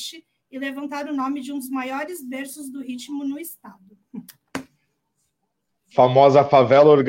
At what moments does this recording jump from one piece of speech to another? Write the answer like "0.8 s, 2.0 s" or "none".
none